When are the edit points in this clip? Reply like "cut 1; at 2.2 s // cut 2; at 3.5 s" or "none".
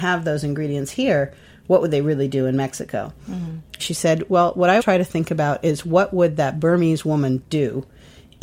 cut 1; at 3.8 s // cut 2; at 4.8 s

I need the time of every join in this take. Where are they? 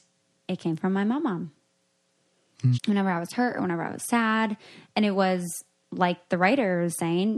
cut 1; at 2.7 s

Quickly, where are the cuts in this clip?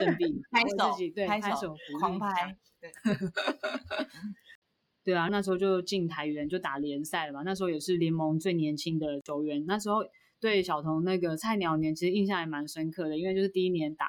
cut 1; at 5.3 s

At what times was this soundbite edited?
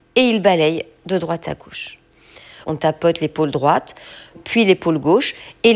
cut 1; at 2.6 s // cut 2; at 4.3 s

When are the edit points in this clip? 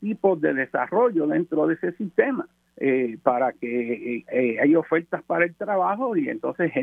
cut 1; at 2.7 s

